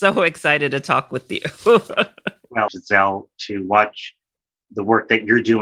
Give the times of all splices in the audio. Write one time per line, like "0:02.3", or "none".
0:02.7